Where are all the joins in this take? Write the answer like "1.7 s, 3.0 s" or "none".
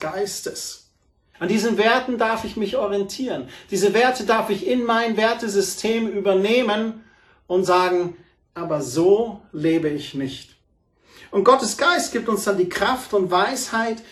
1.3 s, 8.5 s